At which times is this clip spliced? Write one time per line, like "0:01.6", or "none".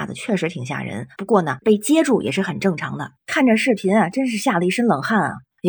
0:03.2

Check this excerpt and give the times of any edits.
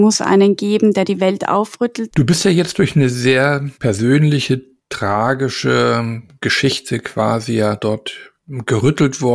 0:02.1
0:03.7

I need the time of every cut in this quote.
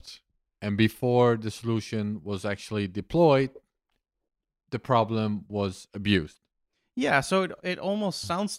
none

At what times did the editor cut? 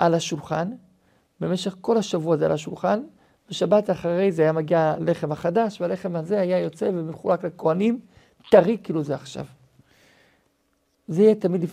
none

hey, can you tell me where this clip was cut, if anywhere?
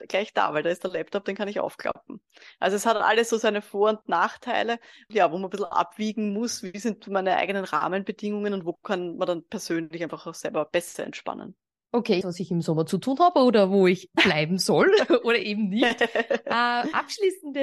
0:05.1
0:12.2

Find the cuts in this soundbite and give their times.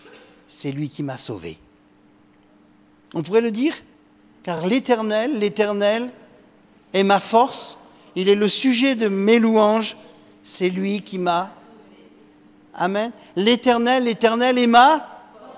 none

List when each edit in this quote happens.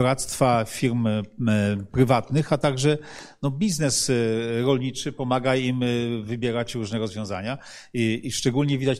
none

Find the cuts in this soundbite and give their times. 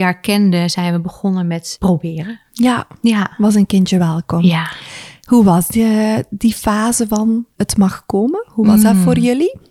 none

